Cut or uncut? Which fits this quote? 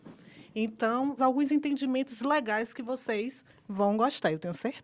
cut